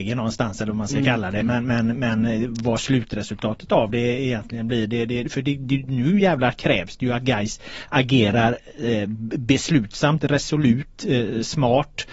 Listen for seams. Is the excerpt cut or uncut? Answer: uncut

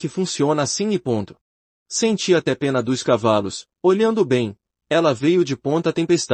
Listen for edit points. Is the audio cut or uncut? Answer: cut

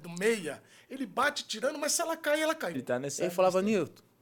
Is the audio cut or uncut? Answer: cut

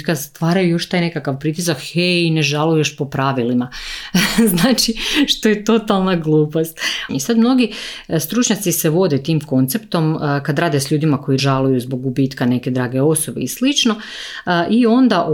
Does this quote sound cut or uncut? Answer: cut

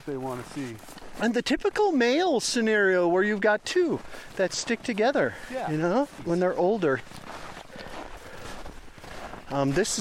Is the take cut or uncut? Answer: uncut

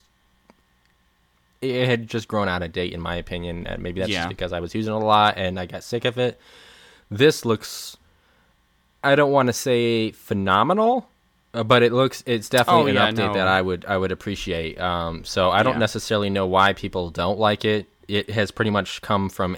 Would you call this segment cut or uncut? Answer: uncut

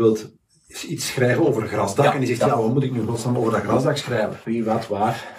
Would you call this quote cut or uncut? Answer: cut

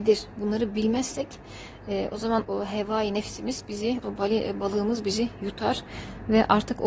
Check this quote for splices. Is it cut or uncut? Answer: cut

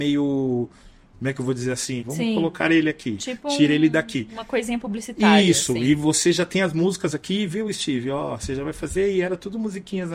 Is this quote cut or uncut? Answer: cut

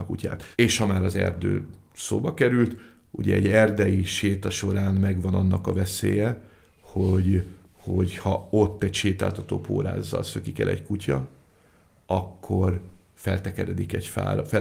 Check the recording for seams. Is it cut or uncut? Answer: uncut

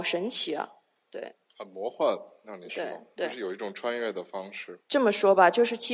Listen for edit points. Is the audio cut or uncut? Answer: cut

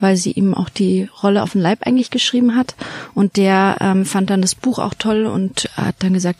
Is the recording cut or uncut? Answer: uncut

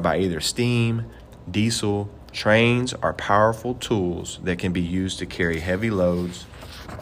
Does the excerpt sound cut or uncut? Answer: cut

